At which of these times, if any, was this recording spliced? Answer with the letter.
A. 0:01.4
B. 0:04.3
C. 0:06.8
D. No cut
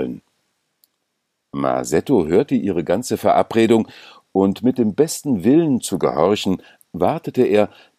D